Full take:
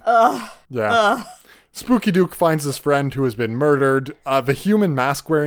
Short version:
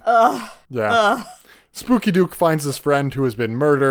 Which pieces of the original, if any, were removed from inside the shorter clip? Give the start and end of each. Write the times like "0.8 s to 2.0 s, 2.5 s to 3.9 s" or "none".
none